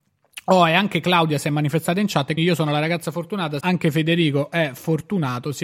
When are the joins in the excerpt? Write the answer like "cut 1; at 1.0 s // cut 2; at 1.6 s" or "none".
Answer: cut 1; at 2.4 s // cut 2; at 3.6 s